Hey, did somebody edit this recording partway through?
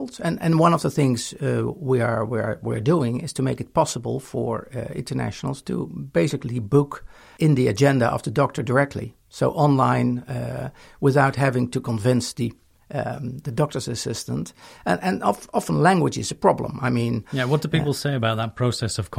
no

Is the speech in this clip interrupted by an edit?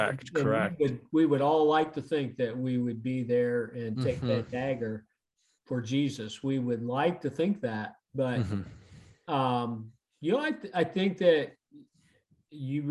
yes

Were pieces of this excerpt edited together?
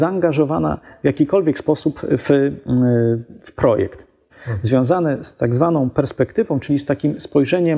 yes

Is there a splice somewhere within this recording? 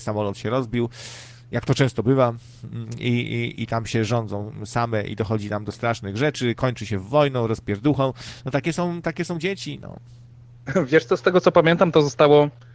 yes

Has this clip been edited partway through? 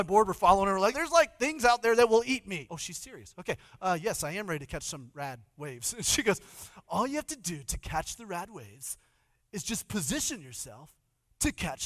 yes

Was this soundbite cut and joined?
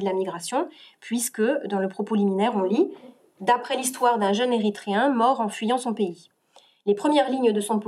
no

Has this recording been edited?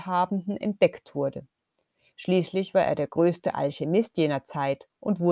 no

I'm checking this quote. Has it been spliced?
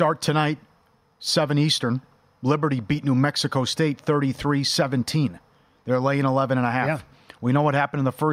no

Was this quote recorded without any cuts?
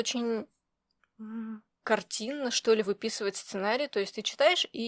yes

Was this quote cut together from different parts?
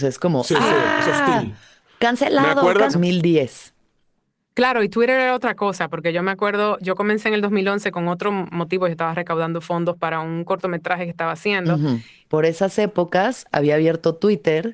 yes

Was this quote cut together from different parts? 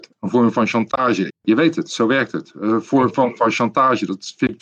yes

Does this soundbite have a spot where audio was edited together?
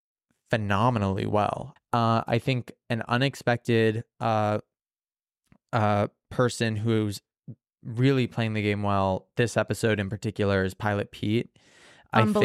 yes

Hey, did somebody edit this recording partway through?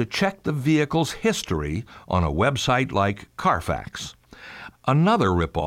yes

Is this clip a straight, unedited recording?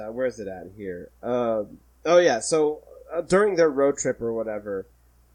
yes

